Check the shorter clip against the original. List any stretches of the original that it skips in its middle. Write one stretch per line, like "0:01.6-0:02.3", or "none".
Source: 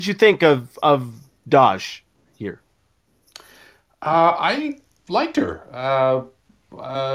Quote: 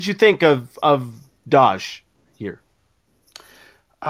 none